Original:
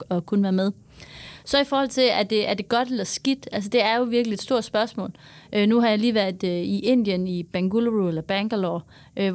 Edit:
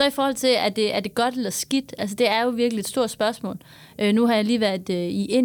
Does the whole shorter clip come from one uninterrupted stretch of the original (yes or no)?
yes